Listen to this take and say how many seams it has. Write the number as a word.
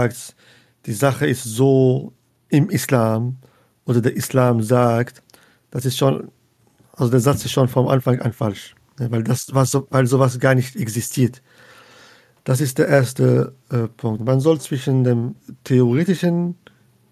one